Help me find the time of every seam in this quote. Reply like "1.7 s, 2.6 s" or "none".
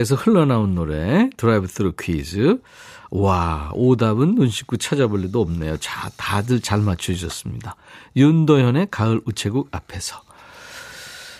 none